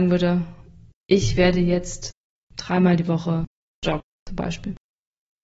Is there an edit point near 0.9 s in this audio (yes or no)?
yes